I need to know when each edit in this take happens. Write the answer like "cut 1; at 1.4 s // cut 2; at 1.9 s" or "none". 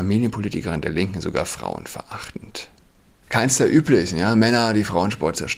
cut 1; at 3.2 s